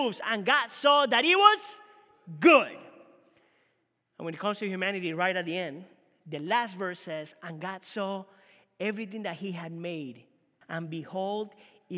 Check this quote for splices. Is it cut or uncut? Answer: cut